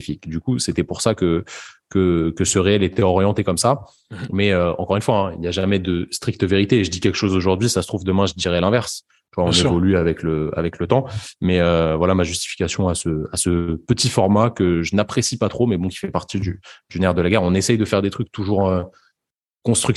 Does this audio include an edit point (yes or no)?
no